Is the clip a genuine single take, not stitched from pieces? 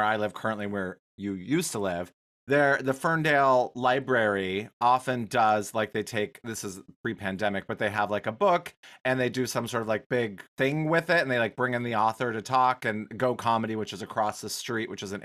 no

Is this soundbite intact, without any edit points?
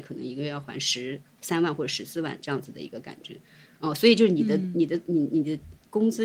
yes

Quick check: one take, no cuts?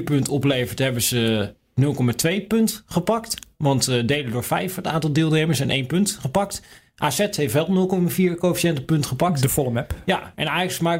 yes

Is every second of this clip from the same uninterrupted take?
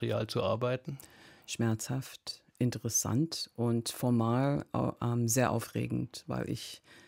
yes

